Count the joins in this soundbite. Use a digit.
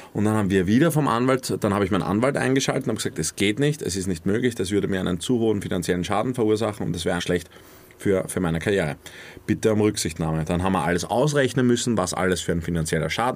1